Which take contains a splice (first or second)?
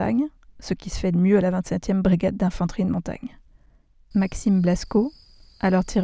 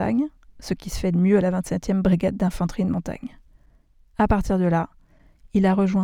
first